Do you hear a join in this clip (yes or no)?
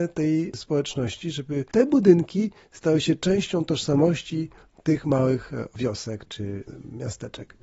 no